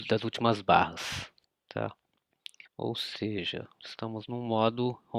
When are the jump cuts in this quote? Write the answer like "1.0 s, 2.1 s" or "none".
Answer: 2.7 s